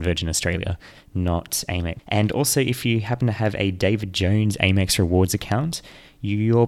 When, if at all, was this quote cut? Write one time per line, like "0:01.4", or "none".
0:02.0